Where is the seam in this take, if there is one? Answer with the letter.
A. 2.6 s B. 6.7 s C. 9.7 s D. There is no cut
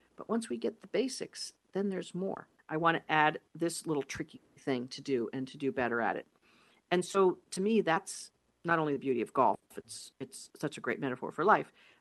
A